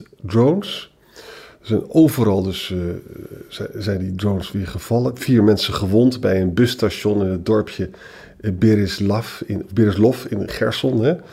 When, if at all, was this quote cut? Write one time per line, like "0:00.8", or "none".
none